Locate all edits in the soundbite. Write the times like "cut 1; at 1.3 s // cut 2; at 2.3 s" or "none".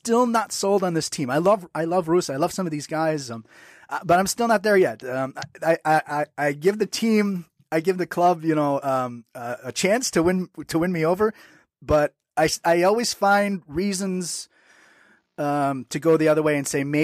none